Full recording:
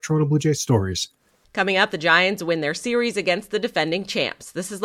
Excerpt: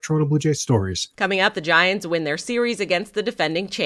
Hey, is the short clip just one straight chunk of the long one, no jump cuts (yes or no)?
no